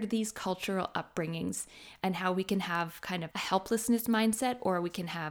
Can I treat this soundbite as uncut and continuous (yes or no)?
no